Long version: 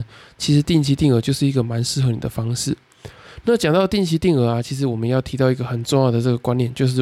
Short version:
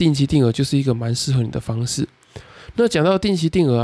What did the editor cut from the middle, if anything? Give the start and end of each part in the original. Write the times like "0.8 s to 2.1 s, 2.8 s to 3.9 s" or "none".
none